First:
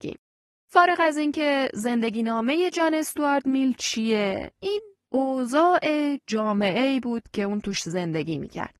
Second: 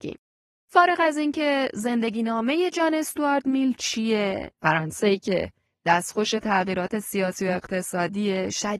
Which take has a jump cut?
second; 1 cut; at 4.5 s

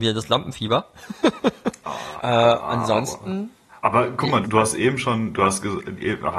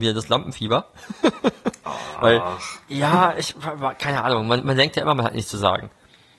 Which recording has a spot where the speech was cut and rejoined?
first; 2 cuts; at 2.2 s, 4.4 s

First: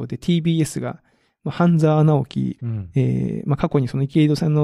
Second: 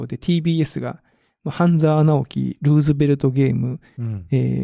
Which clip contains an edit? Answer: first; 1 cut; at 2.6 s

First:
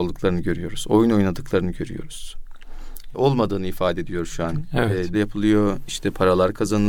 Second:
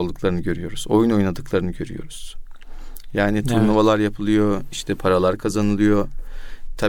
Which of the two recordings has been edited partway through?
first; 2 cuts; at 3.1 s, 5.1 s

